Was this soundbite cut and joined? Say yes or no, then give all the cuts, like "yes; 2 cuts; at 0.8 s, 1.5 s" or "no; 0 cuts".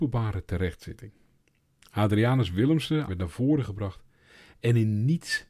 yes; 1 cut; at 3.1 s